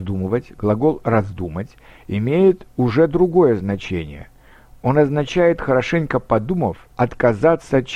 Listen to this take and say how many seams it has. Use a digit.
1